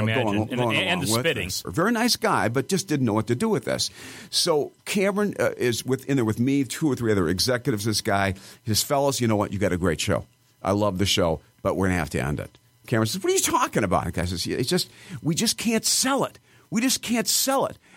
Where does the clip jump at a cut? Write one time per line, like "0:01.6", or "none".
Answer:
0:01.6

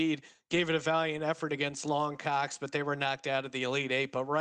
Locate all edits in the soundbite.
none

